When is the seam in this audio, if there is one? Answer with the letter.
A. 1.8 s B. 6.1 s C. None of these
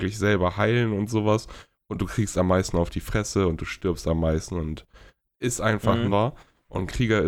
B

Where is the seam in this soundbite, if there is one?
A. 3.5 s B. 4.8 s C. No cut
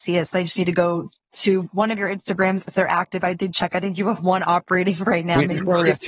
A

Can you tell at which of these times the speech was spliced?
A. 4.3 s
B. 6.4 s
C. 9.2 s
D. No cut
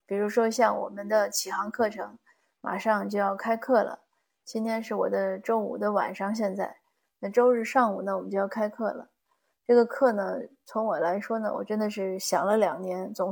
D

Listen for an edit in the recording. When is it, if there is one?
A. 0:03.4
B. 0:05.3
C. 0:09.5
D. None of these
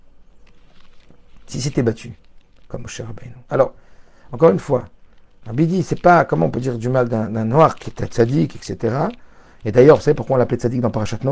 D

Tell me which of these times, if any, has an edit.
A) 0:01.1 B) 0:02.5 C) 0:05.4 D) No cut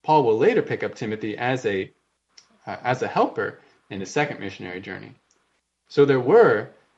D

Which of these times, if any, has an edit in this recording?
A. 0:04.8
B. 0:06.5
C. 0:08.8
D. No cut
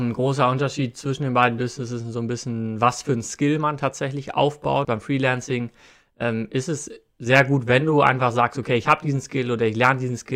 A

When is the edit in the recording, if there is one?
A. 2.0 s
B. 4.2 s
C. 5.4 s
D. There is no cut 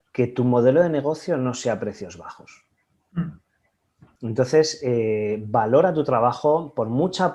B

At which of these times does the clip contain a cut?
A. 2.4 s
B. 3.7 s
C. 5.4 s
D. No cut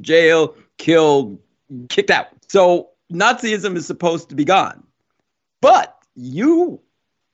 A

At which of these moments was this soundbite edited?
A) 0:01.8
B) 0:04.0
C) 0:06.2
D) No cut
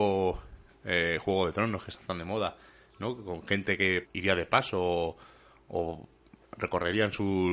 B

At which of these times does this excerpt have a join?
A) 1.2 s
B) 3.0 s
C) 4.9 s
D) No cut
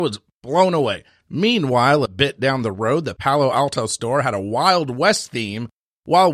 A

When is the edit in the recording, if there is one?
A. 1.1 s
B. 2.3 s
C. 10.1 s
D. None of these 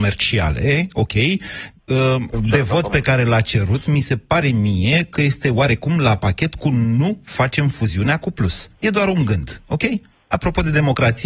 B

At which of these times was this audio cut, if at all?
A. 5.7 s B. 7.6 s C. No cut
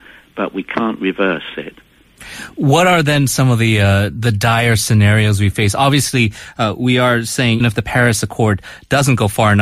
B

